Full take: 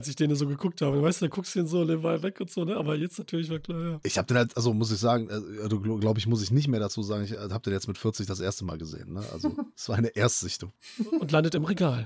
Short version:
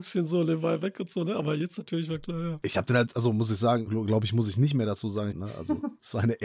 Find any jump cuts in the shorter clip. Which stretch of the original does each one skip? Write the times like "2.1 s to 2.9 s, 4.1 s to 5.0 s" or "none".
5.3 s to 5.8 s, 7.3 s to 9.1 s